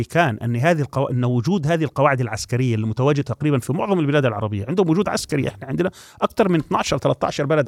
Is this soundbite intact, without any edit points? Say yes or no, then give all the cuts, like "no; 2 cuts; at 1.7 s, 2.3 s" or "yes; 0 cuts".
yes; 0 cuts